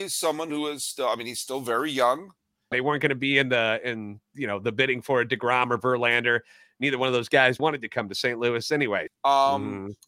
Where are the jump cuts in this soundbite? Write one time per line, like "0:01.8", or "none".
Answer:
0:02.7
0:07.6
0:09.1